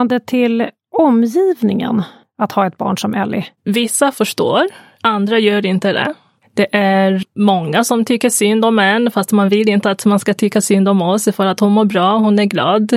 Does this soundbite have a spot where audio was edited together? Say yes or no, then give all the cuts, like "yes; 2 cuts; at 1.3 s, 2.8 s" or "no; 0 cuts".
yes; 2 cuts; at 3.6 s, 7.2 s